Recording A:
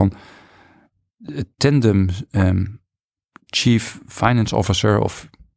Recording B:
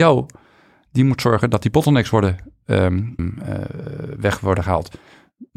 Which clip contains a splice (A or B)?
B